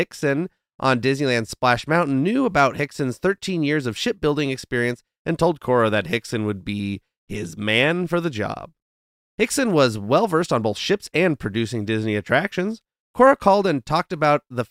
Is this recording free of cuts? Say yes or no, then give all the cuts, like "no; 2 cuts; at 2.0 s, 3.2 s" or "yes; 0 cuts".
yes; 0 cuts